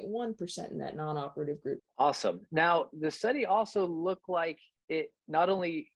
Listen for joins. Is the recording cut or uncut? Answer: cut